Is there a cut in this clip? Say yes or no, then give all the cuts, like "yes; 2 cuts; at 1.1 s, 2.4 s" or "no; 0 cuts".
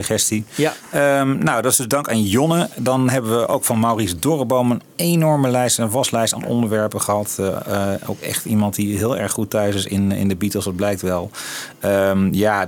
no; 0 cuts